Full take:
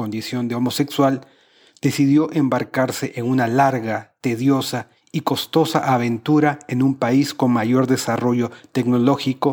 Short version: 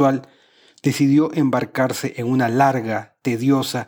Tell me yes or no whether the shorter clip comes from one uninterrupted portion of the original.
yes